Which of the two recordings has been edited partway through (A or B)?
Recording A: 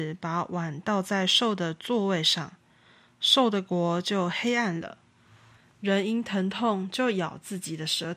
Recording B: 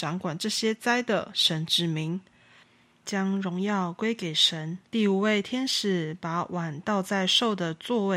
B